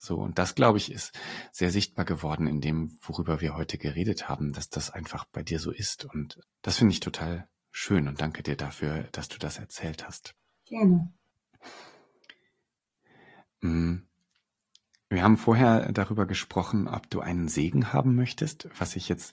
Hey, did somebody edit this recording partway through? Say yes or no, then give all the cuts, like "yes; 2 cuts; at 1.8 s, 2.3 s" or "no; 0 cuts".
no; 0 cuts